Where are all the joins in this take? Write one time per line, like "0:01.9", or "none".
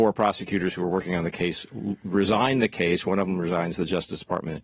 none